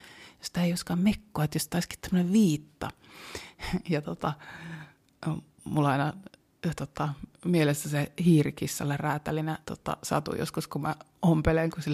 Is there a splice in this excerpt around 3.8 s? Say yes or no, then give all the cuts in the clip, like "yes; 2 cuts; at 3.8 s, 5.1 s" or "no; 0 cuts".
no; 1 cut; at 9.6 s